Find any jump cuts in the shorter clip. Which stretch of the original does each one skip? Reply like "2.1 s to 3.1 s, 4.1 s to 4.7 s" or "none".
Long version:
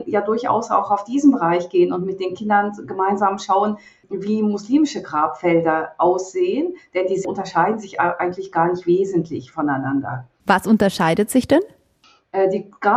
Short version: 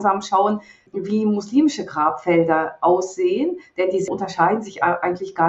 none